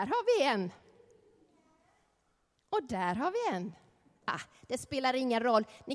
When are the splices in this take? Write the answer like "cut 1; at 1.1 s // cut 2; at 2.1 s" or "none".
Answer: none